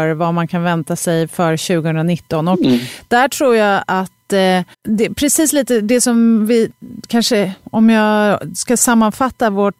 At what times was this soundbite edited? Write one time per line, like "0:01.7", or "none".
0:04.7